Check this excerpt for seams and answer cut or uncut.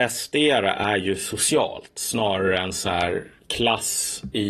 uncut